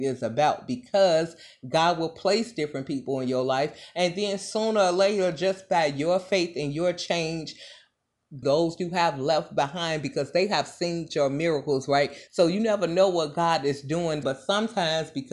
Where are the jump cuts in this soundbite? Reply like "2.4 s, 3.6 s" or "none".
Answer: 8.4 s, 12.3 s, 14.2 s